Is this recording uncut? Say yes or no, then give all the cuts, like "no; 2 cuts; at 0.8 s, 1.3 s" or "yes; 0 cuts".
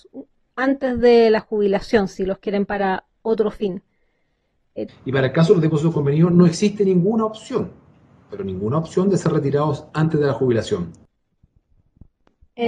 no; 1 cut; at 4.9 s